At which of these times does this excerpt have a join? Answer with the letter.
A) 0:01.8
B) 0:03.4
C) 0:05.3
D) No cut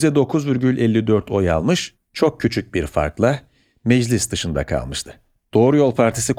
D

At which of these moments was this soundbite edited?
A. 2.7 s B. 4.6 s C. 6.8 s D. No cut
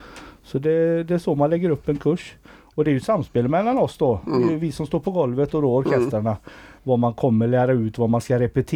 C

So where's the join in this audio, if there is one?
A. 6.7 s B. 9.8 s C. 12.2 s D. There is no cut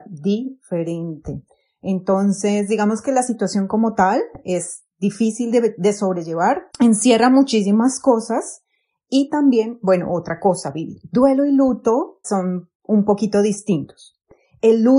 C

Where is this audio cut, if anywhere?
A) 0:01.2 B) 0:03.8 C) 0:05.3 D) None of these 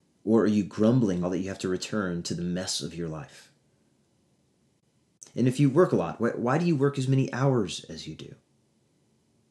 A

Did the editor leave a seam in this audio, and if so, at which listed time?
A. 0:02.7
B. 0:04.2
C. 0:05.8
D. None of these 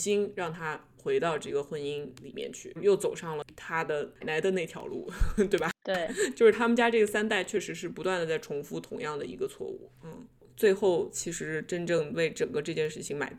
B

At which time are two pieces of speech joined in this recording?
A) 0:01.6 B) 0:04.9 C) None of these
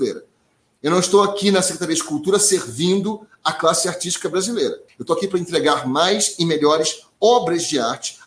B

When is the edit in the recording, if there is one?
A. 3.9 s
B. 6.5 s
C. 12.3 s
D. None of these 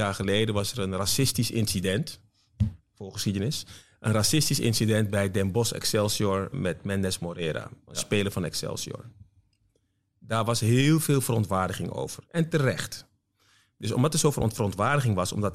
B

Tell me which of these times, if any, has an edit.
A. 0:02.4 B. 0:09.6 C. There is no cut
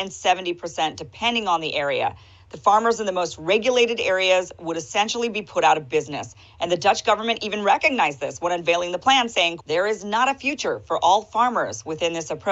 B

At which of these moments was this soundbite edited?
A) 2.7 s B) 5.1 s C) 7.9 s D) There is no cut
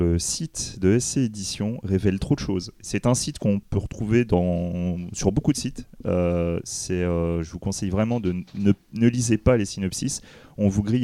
D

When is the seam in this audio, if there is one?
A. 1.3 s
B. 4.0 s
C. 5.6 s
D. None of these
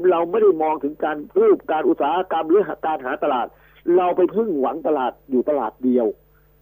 A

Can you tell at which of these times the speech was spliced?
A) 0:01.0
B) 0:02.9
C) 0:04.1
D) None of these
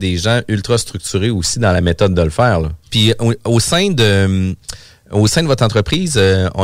B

